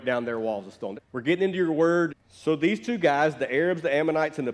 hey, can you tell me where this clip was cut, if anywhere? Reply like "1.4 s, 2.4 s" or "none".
1.0 s, 2.1 s